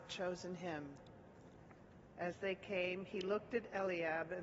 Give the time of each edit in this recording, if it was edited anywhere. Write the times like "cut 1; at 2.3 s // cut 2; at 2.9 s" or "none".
cut 1; at 2.1 s